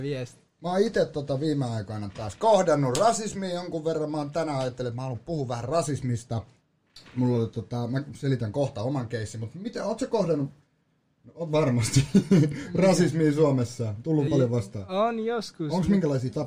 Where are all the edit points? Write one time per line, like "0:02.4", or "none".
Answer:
0:14.3

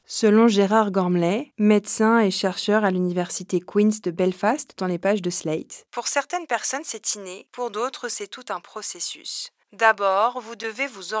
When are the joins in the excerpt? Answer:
none

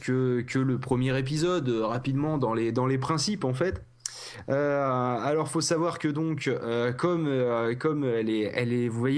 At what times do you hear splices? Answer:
none

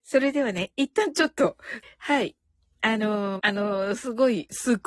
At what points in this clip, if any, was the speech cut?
0:01.8
0:03.4

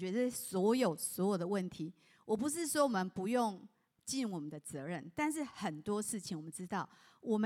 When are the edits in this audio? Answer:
none

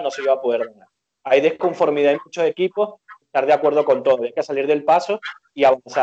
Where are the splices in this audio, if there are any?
0:03.2

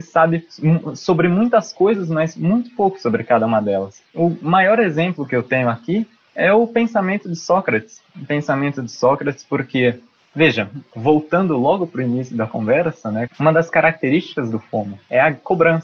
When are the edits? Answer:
0:13.3

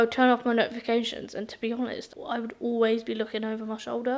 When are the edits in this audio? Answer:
none

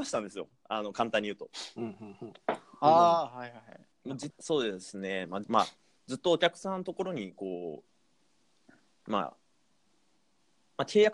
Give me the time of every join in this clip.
0:04.3
0:05.4

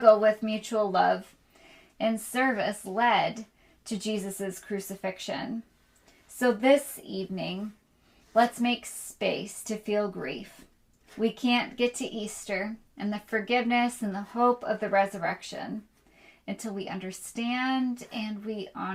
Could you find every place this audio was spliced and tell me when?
none

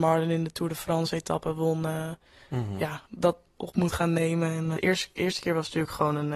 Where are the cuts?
0:03.6
0:04.8

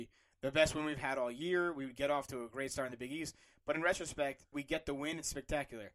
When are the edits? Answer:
0:04.5

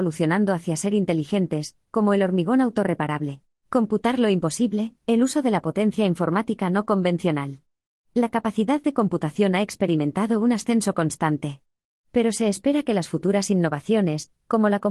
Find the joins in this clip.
0:03.6

